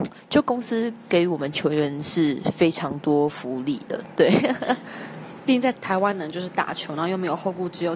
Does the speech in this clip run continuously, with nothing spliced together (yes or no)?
no